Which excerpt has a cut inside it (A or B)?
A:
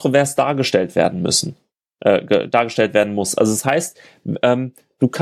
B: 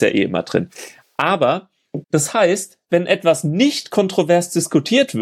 B